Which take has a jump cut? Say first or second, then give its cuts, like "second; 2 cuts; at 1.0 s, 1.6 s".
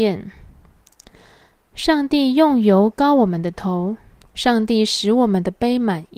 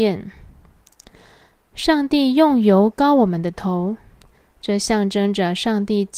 first; 1 cut; at 4.3 s